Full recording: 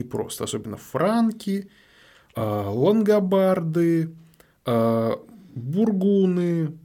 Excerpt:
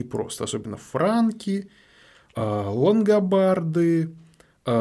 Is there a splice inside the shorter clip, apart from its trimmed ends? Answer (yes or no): no